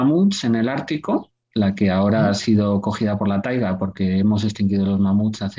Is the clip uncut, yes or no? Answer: yes